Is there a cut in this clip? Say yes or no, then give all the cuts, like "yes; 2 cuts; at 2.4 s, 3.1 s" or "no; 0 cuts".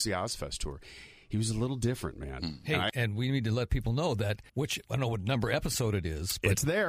yes; 1 cut; at 4.5 s